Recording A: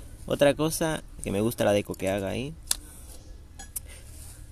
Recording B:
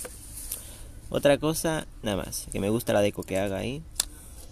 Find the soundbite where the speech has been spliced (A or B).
A